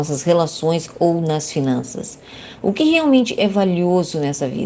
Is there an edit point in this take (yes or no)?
no